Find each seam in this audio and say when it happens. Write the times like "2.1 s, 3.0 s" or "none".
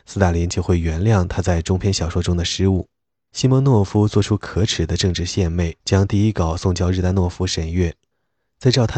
3.3 s, 5.8 s

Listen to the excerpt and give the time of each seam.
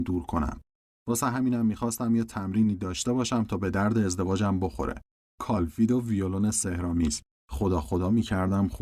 7.3 s

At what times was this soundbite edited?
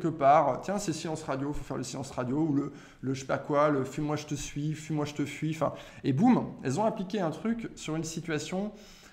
none

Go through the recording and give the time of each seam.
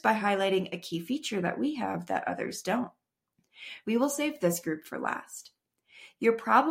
3.8 s

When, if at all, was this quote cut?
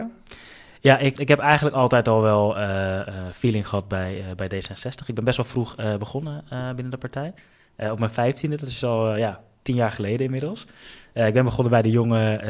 1.2 s

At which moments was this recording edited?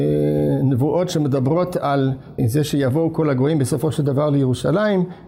2.4 s

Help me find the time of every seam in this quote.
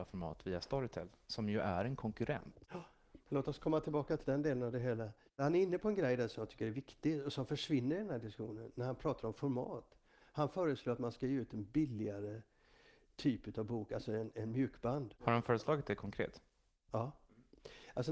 4.2 s

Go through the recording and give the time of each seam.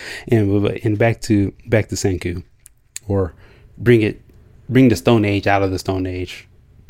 3.0 s

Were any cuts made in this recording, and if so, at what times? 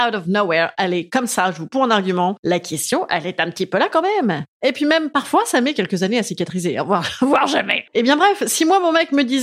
4.5 s, 7.9 s

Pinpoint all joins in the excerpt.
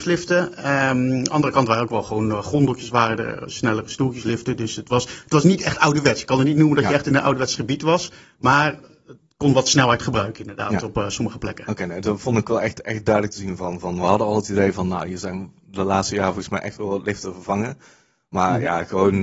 none

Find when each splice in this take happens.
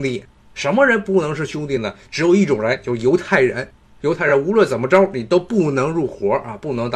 none

